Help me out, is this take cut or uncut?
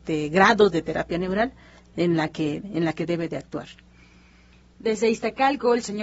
uncut